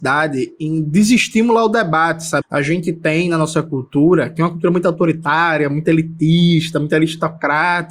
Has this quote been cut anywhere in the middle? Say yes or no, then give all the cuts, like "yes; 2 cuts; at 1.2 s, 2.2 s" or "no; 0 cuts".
yes; 1 cut; at 2.4 s